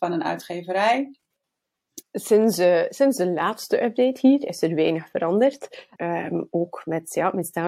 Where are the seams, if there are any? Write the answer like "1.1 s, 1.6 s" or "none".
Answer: 2.0 s, 6.0 s